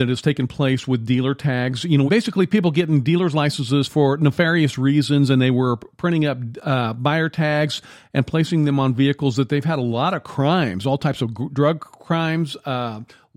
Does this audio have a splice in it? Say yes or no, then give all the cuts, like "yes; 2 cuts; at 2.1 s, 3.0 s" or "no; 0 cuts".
yes; 1 cut; at 2.1 s